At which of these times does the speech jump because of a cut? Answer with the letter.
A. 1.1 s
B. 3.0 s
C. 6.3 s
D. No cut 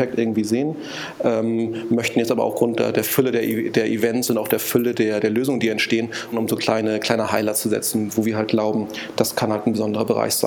C